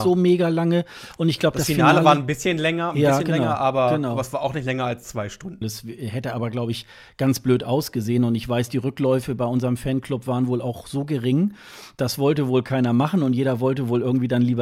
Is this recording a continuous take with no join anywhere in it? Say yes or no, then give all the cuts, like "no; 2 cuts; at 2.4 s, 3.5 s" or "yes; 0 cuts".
no; 1 cut; at 5.6 s